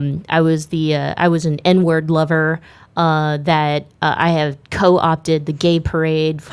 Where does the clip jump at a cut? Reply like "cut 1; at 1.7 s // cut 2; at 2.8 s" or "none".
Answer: none